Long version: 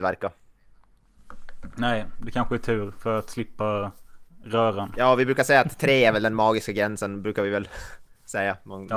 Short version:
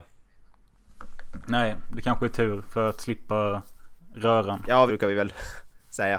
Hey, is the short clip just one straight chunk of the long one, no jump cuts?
no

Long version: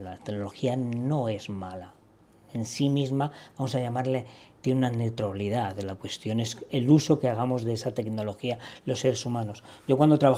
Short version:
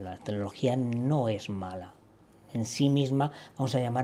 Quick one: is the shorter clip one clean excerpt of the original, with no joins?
yes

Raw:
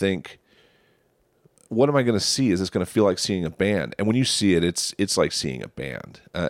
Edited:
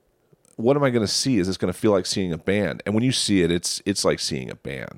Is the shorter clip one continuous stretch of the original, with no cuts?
yes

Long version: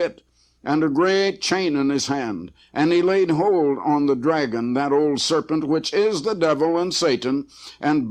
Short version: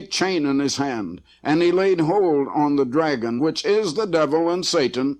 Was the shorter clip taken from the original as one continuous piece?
no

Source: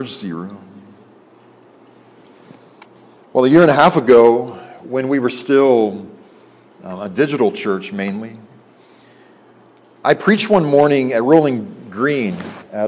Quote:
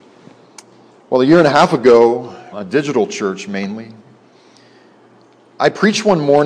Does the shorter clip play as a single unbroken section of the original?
no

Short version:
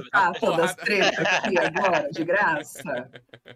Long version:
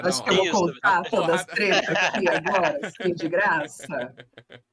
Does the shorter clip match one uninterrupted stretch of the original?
no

